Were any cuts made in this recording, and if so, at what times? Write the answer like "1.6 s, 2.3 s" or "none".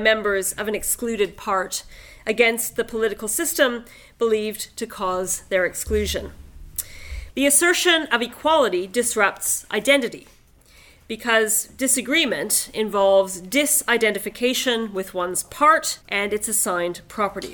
7.3 s, 16.0 s